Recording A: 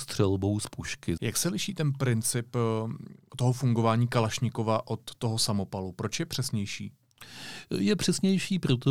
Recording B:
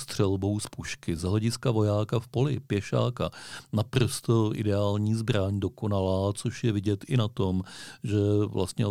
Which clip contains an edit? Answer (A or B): A